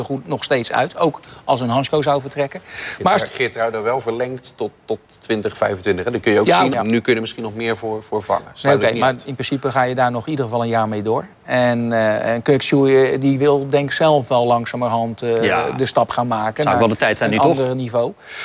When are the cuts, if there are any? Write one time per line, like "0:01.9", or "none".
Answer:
0:06.7